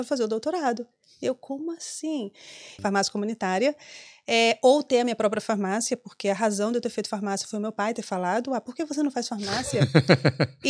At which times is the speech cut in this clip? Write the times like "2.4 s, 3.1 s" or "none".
2.8 s